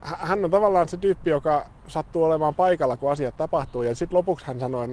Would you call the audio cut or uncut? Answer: uncut